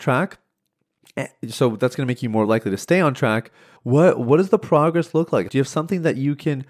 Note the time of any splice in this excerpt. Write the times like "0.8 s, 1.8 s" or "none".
3.8 s, 5.5 s